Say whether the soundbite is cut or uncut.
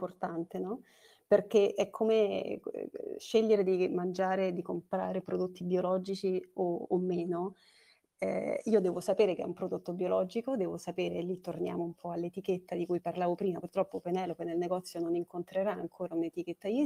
uncut